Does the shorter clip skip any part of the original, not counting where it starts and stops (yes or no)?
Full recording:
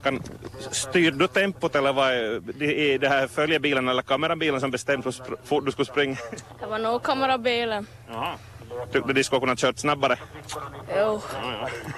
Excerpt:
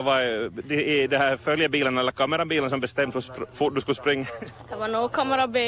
no